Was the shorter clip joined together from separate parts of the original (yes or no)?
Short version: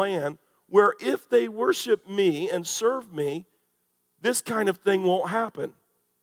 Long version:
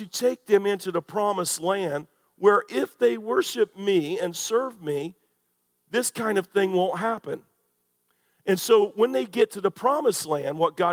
no